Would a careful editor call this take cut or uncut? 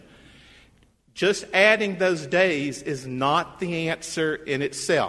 uncut